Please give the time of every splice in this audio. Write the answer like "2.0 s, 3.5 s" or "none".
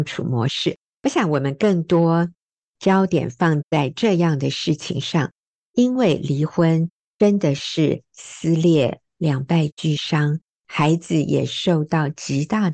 none